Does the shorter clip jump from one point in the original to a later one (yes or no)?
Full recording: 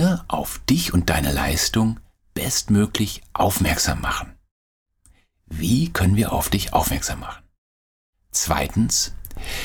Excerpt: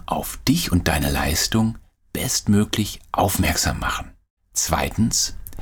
yes